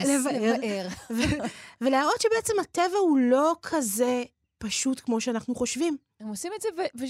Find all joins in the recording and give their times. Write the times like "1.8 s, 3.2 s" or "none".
6.1 s